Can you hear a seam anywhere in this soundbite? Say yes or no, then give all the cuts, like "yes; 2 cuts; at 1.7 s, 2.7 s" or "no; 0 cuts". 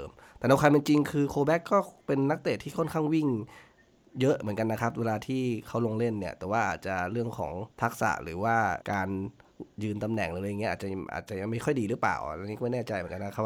yes; 2 cuts; at 7.7 s, 8.8 s